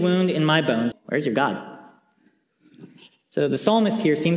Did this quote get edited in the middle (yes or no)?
yes